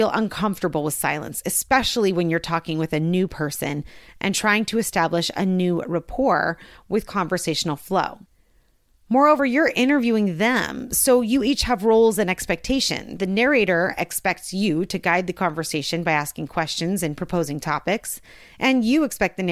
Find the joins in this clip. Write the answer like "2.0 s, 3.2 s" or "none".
none